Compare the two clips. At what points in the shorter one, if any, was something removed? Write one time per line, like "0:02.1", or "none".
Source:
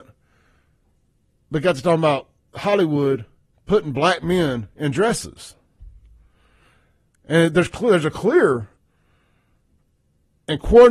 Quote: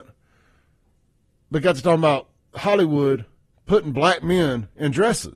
none